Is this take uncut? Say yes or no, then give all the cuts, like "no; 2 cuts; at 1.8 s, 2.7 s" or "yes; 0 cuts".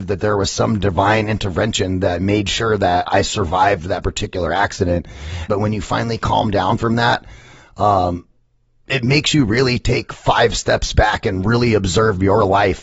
no; 1 cut; at 5.5 s